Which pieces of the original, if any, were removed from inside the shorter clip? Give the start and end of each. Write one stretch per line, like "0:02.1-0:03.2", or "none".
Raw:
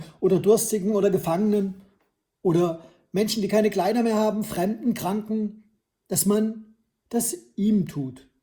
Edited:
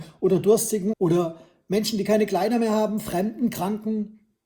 0:00.9-0:02.4